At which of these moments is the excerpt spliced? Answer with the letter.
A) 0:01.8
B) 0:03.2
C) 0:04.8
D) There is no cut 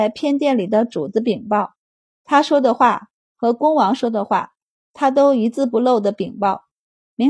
D